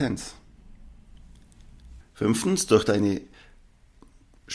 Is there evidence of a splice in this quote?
yes; 1 cut; at 2.0 s

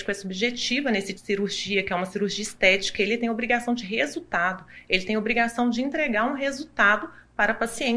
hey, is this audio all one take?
no; 1 cut; at 1.1 s

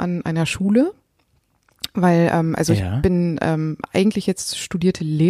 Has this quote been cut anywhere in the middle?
no; 0 cuts

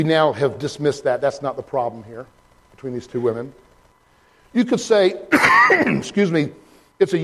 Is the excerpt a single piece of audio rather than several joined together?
yes; 0 cuts

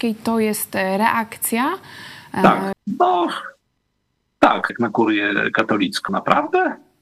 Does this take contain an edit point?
yes; 3 cuts; at 2.7 s, 4.7 s, 6.1 s

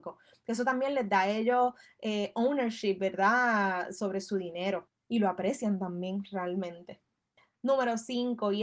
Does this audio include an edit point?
no; 0 cuts

